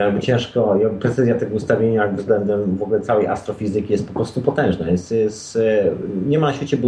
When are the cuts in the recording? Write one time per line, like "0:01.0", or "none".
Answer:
none